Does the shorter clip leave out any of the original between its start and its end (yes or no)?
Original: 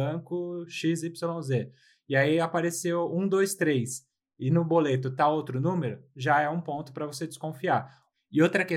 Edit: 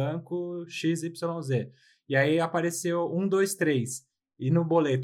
no